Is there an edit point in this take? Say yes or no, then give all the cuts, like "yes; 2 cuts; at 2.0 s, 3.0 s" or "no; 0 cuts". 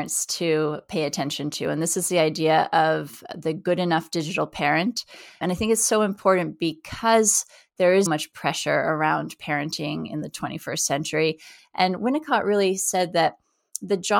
yes; 2 cuts; at 8.1 s, 11.6 s